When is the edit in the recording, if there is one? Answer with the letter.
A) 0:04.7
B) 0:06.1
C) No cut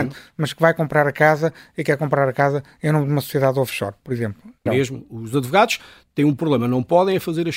A